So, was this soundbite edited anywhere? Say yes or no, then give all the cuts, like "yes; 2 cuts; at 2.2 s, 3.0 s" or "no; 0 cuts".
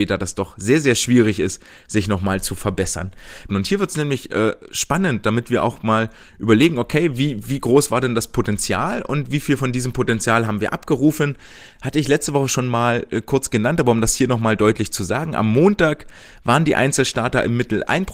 yes; 1 cut; at 3.5 s